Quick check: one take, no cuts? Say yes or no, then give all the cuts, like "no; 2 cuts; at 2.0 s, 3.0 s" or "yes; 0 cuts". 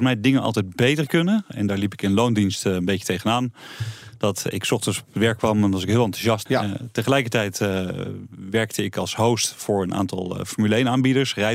no; 1 cut; at 6.5 s